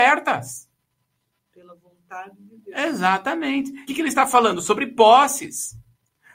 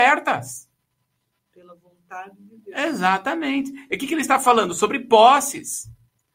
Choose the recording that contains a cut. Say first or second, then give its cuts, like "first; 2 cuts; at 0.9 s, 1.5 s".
first; 1 cut; at 3.9 s